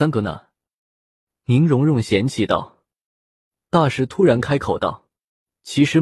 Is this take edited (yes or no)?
no